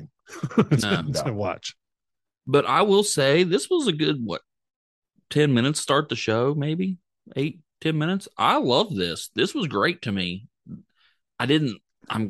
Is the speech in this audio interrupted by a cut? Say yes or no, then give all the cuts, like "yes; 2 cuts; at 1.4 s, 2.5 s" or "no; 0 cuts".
no; 0 cuts